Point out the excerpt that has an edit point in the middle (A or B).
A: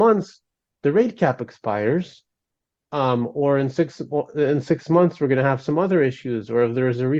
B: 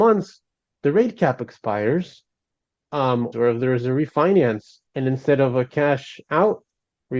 B